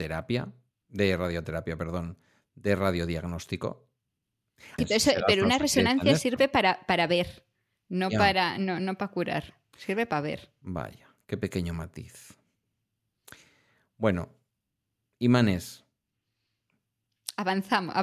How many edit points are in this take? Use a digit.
1